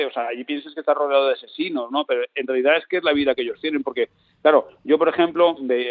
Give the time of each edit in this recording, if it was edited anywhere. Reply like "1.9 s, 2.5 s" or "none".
none